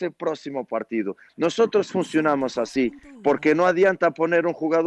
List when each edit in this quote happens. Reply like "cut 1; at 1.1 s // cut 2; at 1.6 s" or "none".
none